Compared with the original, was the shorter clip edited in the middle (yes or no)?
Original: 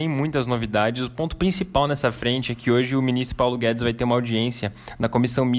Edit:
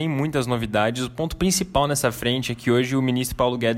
no